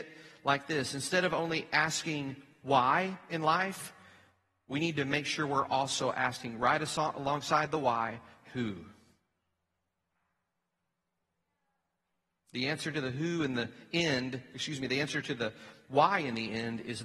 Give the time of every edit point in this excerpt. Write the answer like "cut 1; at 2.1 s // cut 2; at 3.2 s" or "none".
none